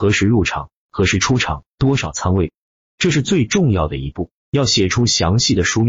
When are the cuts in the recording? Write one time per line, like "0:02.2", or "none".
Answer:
0:04.4